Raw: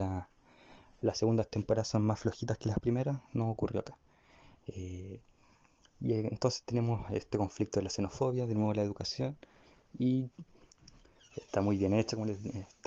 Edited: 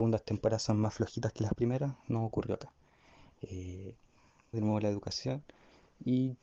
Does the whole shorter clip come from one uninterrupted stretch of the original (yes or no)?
no